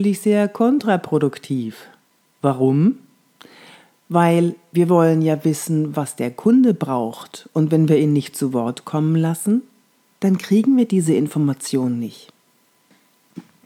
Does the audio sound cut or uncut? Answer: uncut